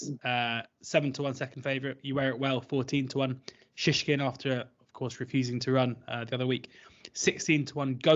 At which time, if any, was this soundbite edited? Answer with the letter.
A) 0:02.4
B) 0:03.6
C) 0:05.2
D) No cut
D